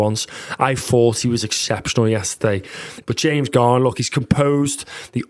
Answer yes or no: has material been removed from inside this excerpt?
yes